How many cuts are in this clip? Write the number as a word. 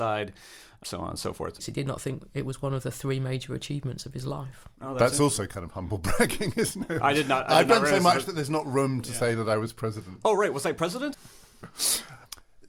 two